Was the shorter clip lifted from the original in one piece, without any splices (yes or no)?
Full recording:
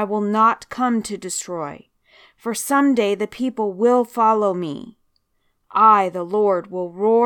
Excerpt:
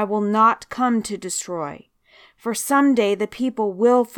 yes